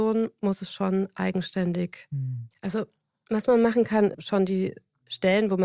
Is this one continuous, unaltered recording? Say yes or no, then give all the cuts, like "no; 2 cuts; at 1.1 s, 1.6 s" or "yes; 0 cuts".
no; 2 cuts; at 2.5 s, 4.1 s